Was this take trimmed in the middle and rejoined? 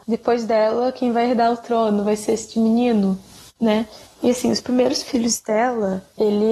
no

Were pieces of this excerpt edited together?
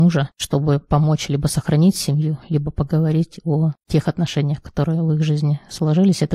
no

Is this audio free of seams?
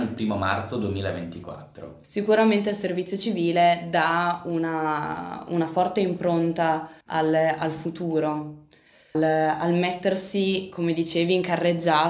no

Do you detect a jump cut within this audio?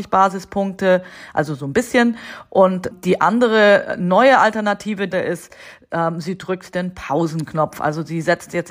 yes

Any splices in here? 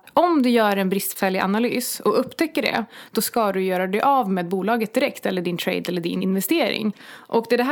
no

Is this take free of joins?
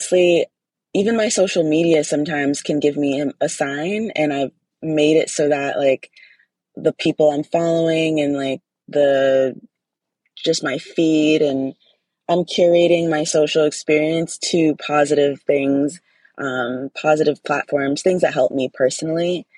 yes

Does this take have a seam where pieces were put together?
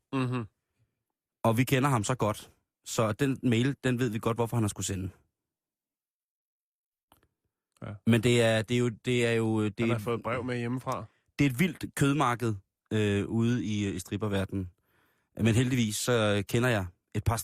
no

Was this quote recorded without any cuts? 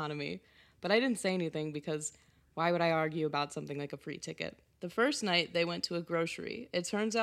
yes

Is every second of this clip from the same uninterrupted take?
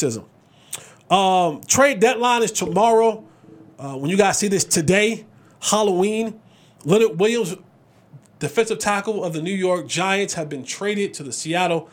yes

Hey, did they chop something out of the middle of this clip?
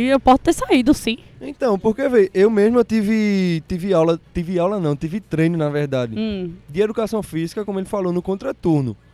no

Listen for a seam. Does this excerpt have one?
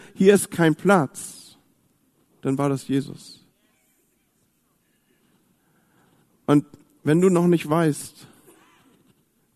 no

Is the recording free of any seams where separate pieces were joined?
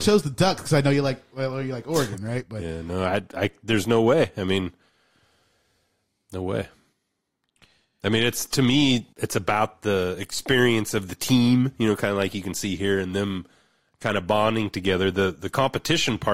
no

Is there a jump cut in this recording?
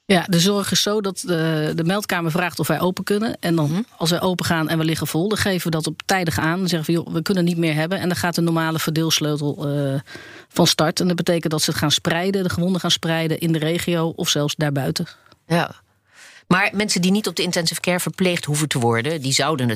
no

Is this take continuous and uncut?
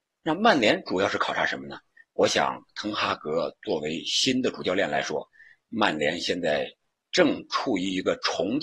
yes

